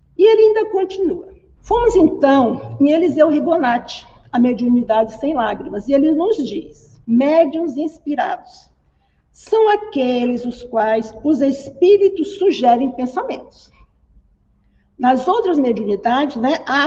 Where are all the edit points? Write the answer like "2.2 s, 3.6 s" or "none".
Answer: 1.6 s, 7.0 s

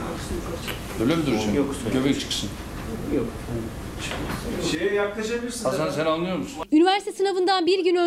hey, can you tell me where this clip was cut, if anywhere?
none

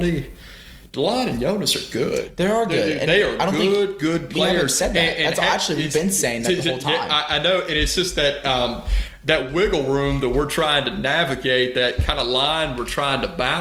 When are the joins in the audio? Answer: none

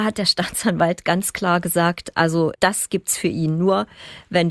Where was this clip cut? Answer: 2.5 s

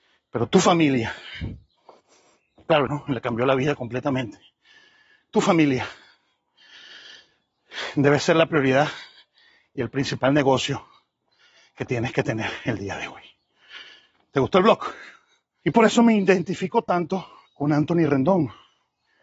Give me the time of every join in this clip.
2.9 s, 15.6 s, 17.5 s

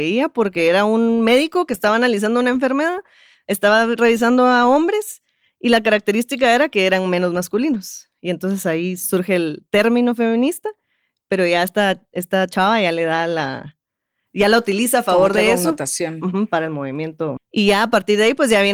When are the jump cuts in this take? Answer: 17.4 s

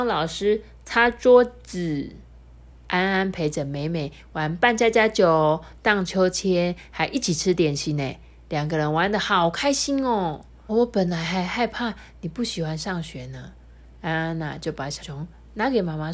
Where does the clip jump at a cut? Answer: 2.7 s, 10.7 s, 15.0 s

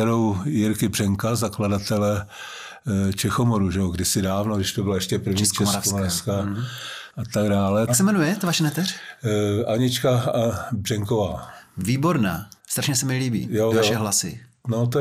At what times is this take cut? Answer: 7.9 s, 12.6 s, 13.7 s

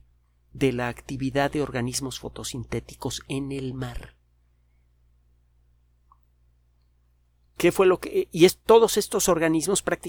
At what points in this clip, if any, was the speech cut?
none

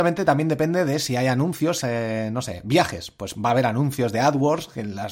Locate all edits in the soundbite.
1.8 s

